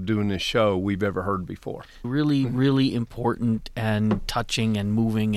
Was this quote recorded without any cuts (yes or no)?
no